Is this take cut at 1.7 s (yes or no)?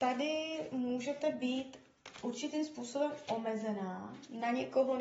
no